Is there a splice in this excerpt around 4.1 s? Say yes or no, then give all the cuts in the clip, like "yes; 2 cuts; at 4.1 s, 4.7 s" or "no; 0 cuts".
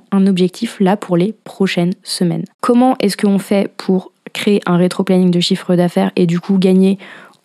no; 1 cut; at 2.5 s